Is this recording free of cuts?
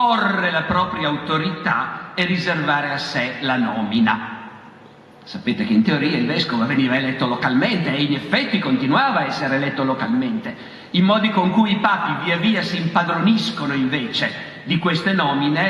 yes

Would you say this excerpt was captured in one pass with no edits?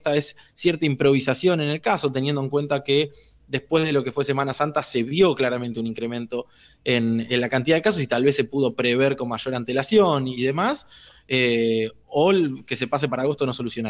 yes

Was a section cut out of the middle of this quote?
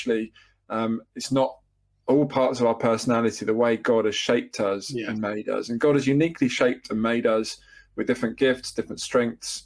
no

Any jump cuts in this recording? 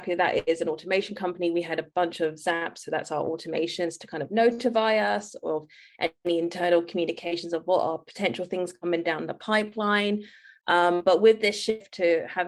no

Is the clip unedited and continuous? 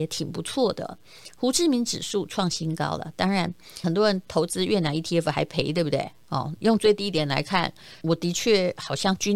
no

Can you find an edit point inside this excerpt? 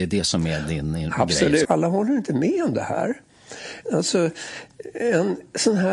yes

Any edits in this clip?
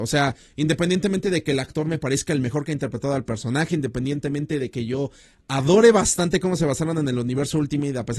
no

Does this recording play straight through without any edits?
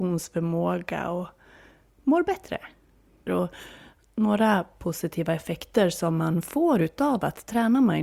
no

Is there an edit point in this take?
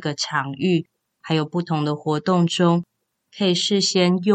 no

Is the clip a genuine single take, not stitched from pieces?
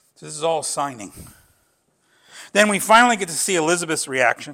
yes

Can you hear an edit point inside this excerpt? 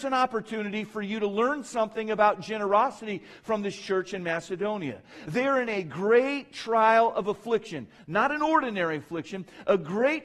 no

